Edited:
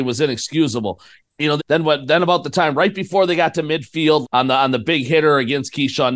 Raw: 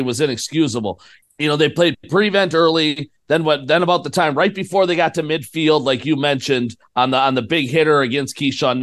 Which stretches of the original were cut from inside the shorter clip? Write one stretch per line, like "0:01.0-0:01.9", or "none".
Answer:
0:01.6-0:03.2
0:05.8-0:06.9